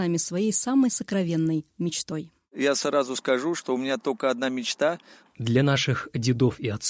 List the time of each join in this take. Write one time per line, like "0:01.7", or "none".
0:05.3